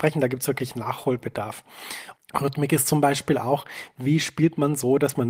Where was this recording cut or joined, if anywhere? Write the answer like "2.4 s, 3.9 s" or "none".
2.1 s